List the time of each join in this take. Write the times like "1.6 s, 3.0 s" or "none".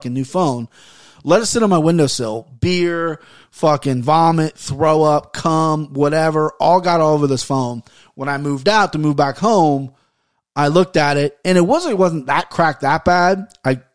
none